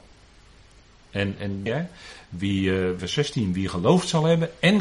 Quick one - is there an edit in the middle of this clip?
yes; 2 cuts; at 1.7 s, 3.0 s

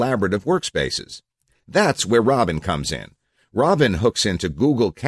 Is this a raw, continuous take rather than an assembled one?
yes; 0 cuts

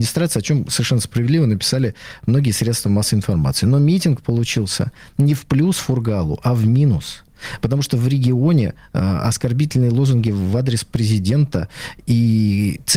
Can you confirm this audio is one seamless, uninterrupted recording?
yes; 0 cuts

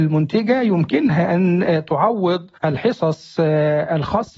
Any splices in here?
yes; 1 cut; at 2.6 s

